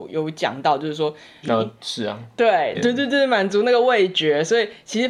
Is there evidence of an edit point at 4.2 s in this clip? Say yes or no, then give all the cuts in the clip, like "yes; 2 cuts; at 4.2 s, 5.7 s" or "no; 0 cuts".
no; 2 cuts; at 1.4 s, 2.7 s